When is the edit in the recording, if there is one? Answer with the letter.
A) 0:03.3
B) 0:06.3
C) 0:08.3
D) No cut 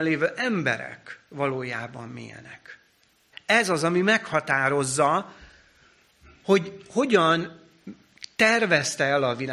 A